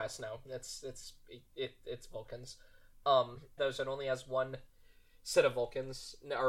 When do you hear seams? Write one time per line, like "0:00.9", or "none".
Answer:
0:03.6